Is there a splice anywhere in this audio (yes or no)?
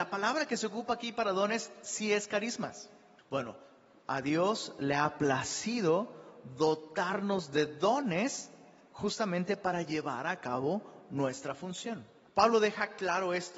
yes